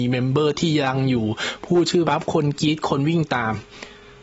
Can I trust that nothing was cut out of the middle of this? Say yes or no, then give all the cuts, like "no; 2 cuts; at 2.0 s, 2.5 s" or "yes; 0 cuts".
no; 1 cut; at 2.0 s